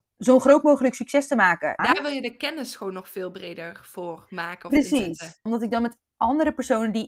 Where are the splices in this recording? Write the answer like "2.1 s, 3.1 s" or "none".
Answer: 1.8 s, 5.5 s